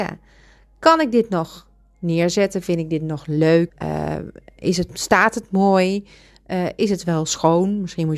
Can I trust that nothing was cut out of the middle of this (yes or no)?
no